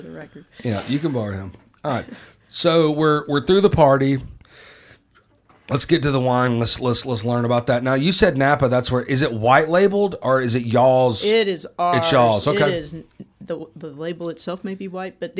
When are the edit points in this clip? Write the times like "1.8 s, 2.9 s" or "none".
none